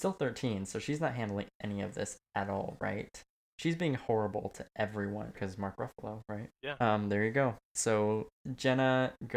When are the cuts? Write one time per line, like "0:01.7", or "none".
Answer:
0:03.5
0:05.3
0:06.6

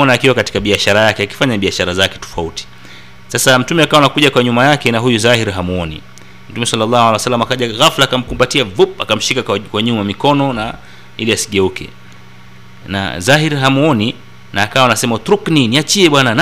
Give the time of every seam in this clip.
0:02.2

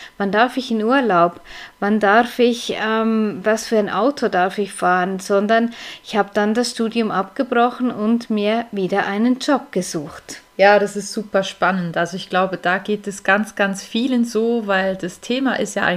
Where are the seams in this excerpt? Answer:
0:10.5

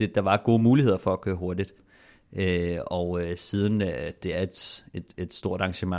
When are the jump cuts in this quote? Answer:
0:01.8

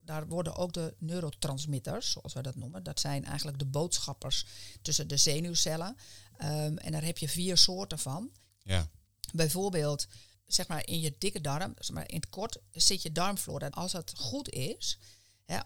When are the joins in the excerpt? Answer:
0:08.5
0:12.1
0:13.7

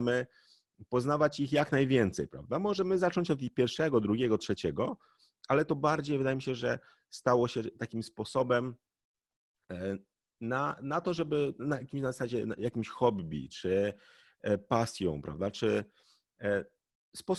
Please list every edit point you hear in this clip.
none

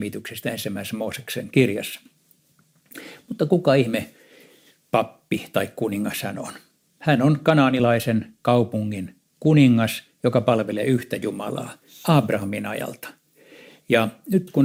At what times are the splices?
none

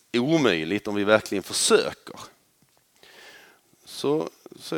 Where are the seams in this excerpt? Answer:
0:03.6

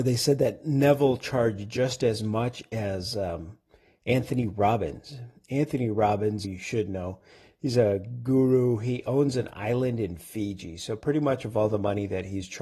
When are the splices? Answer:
0:06.4

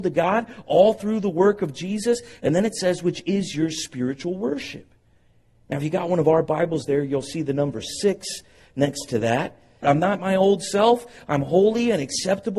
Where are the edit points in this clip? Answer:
0:09.8

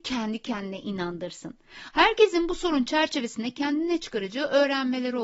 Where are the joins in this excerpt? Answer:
0:01.9

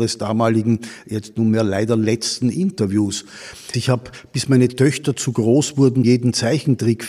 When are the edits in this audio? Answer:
0:03.7
0:06.0

